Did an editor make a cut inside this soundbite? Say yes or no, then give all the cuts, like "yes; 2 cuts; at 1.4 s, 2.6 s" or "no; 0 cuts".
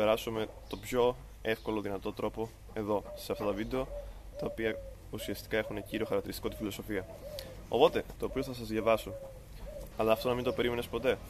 yes; 2 cuts; at 8.2 s, 9.9 s